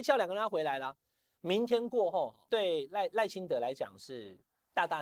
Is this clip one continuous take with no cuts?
yes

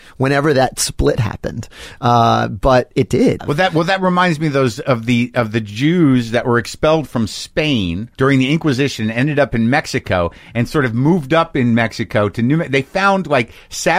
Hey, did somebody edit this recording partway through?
yes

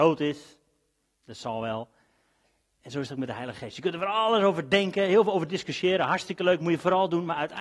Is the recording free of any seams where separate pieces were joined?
yes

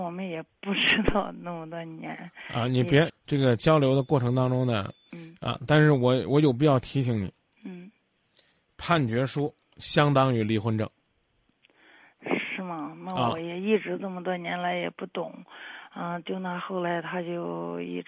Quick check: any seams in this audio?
yes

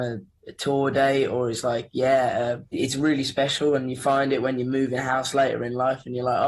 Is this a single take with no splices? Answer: no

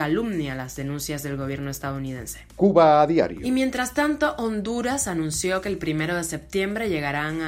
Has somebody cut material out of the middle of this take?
no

